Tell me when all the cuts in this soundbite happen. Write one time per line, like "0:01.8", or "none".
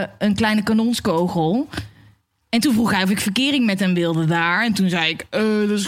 none